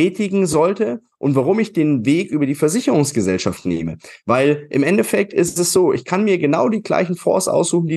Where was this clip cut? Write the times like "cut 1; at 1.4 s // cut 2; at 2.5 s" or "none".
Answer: none